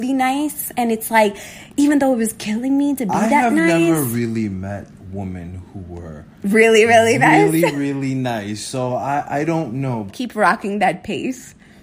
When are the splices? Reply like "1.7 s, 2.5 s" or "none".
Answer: 10.1 s

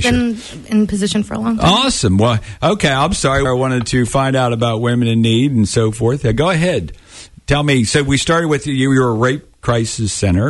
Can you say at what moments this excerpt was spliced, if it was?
3.5 s

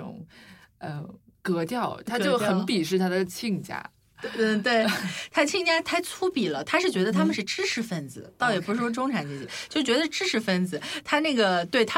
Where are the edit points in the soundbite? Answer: none

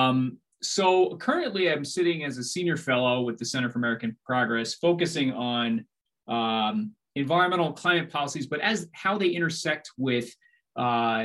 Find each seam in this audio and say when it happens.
none

